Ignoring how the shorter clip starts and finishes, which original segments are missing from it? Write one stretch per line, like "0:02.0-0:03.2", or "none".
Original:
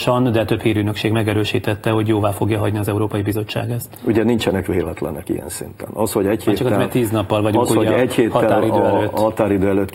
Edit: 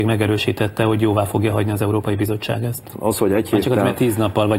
0:04.0-0:05.9